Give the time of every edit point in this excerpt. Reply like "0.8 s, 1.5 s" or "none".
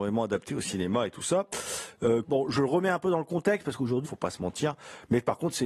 2.2 s, 4.0 s